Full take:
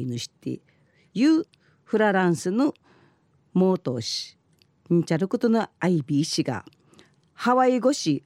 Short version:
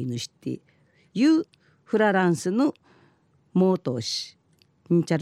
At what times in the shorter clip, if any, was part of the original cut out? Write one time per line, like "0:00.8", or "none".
none